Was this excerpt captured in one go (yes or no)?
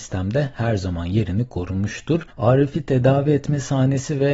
no